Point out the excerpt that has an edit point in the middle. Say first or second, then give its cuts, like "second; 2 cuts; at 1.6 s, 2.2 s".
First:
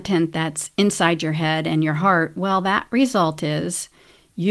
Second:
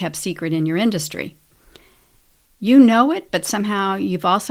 second; 1 cut; at 2.5 s